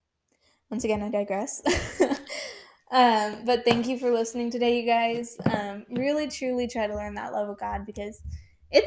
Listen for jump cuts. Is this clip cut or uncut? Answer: uncut